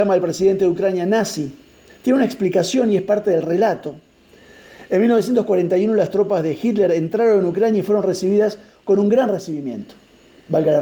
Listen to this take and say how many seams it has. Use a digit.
0